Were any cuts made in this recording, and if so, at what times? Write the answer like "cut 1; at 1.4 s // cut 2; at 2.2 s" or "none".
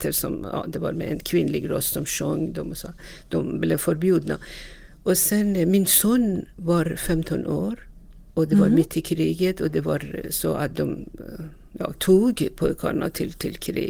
cut 1; at 11.9 s

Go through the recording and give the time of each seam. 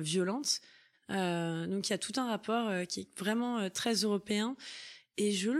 cut 1; at 0.9 s

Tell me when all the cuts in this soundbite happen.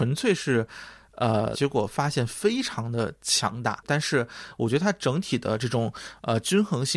cut 1; at 1.5 s // cut 2; at 3.8 s

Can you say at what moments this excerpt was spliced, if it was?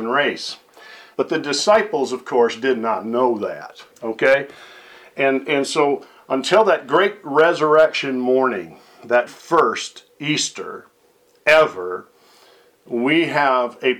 cut 1; at 1.1 s // cut 2; at 3.9 s // cut 3; at 9.3 s

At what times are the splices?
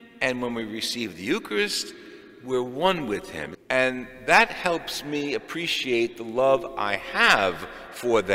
cut 1; at 3.5 s

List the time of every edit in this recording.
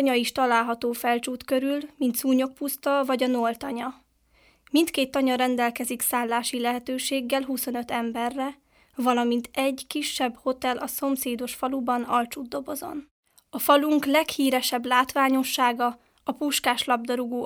none

